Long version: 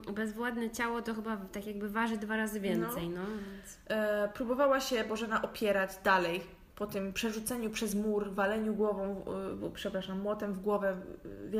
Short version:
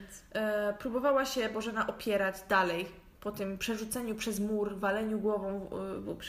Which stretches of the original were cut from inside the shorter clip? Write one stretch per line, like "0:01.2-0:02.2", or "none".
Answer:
none